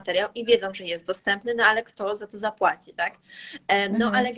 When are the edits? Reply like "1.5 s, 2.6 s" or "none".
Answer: none